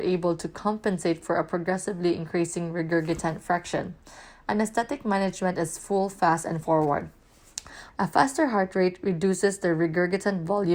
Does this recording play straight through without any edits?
no; 1 cut; at 7.9 s

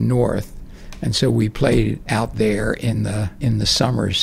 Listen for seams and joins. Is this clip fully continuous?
yes; 0 cuts

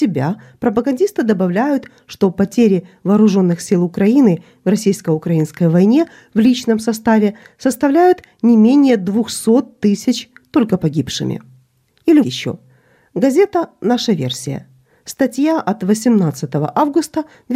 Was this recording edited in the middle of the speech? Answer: yes; 1 cut; at 12.2 s

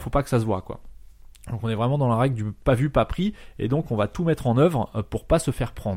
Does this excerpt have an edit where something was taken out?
no; 0 cuts

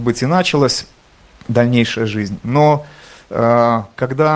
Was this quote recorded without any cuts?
yes; 0 cuts

